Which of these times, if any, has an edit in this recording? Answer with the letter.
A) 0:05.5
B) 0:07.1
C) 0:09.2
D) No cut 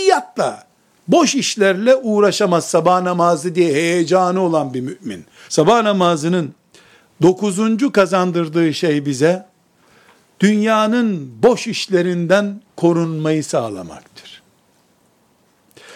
A